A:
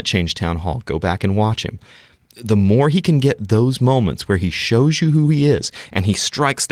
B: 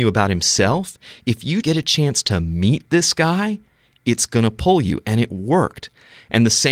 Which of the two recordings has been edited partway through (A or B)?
B